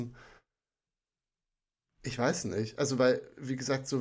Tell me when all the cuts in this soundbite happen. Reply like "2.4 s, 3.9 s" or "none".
none